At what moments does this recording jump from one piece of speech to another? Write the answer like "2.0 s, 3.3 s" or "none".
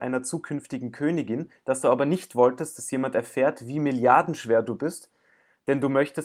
none